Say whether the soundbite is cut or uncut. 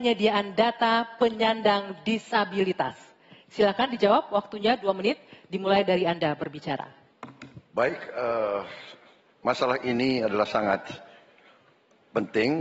cut